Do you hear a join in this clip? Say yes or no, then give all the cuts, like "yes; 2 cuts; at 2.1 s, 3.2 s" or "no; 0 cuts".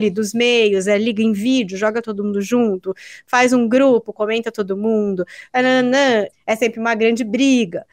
yes; 1 cut; at 6.3 s